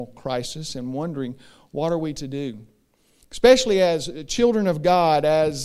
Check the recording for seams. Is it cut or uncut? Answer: uncut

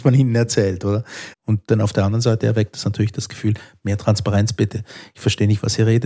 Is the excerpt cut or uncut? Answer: cut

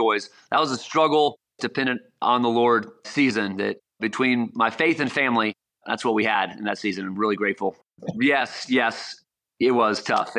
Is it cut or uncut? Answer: cut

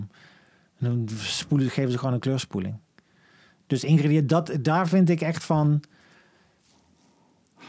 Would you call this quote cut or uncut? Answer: uncut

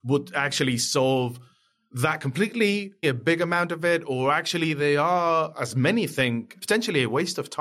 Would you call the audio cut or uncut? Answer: cut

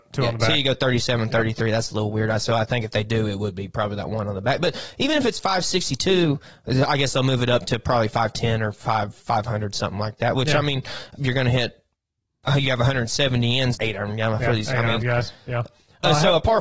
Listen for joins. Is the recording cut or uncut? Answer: cut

